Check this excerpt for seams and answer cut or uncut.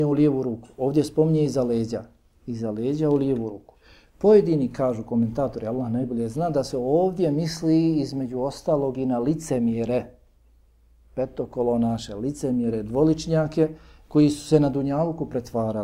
uncut